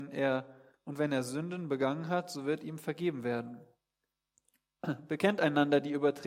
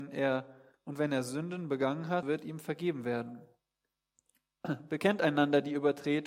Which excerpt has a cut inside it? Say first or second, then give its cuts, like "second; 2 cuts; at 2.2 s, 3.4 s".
second; 1 cut; at 2.2 s